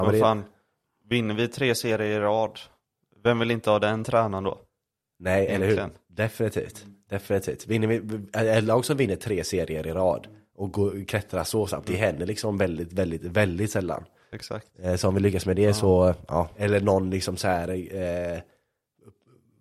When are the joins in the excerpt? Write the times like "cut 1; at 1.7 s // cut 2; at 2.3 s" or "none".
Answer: cut 1; at 16.5 s